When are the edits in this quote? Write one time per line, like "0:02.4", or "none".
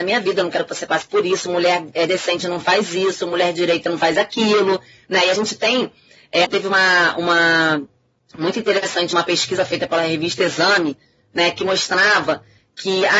0:06.4